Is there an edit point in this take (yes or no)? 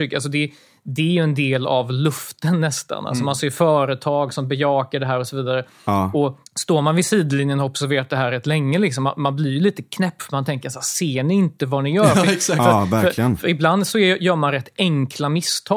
yes